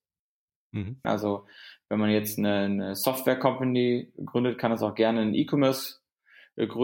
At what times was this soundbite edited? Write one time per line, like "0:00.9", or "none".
0:01.0